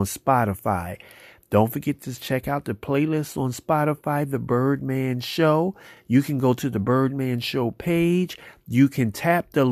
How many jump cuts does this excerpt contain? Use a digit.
0